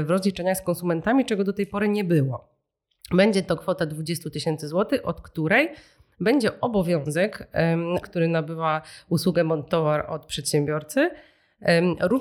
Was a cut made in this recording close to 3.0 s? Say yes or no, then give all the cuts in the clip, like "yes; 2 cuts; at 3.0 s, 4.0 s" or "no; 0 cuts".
no; 1 cut; at 8.0 s